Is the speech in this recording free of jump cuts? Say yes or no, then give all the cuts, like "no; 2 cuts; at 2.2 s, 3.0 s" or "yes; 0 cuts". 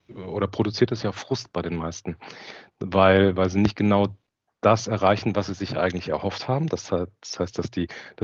yes; 0 cuts